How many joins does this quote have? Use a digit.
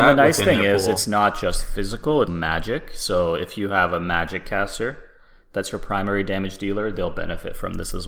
1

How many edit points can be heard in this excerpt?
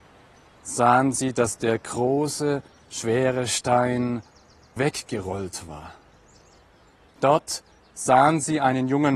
2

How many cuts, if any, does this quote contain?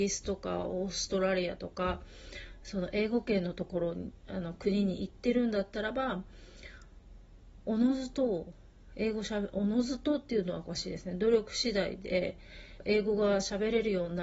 1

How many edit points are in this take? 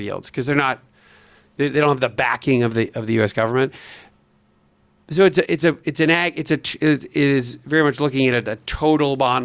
0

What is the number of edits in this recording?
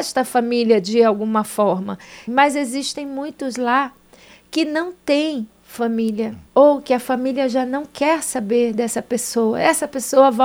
1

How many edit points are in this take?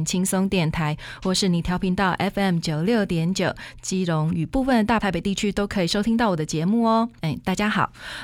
0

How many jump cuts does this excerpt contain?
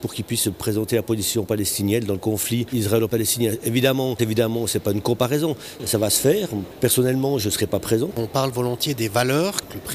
3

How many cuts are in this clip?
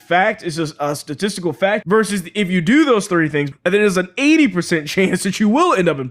2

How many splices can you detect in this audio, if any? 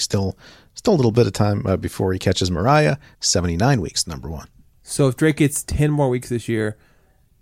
1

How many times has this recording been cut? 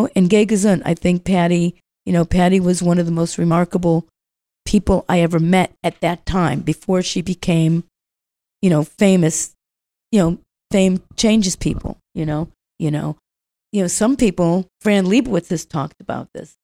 2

